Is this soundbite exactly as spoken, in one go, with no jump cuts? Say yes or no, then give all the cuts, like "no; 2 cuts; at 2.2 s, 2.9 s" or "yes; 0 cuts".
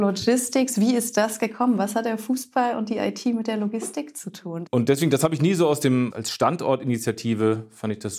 no; 2 cuts; at 4.7 s, 6.1 s